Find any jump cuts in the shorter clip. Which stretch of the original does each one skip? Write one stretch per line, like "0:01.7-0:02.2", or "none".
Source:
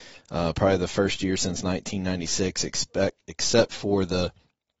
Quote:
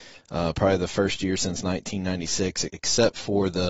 0:02.7-0:03.2